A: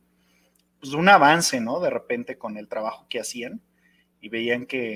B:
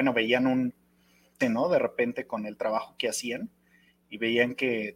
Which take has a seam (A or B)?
B